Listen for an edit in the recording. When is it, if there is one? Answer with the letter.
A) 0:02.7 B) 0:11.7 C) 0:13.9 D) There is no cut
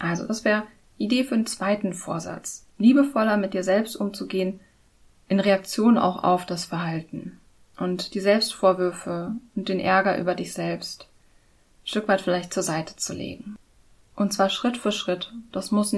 D